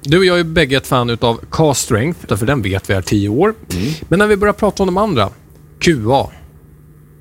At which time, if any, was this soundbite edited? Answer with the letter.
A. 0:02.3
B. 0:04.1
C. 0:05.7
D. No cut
A